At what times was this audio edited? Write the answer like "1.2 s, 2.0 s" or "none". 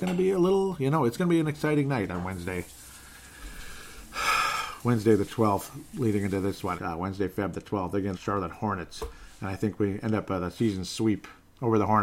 6.8 s, 8.1 s